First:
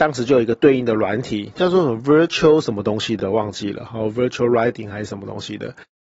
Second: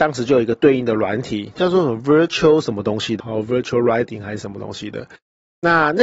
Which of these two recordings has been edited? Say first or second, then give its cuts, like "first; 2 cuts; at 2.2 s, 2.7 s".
second; 1 cut; at 3.2 s